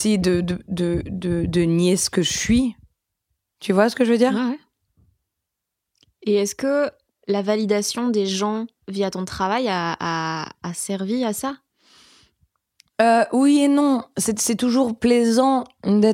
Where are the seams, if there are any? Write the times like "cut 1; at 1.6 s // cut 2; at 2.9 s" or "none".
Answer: none